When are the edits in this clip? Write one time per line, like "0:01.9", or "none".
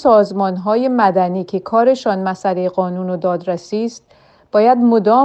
none